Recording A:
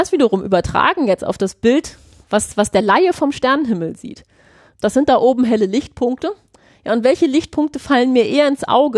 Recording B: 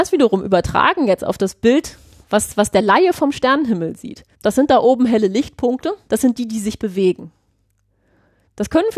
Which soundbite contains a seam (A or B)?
B